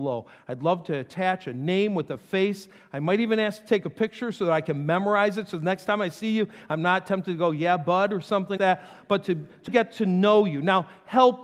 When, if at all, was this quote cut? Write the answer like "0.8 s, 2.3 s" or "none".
8.6 s, 9.7 s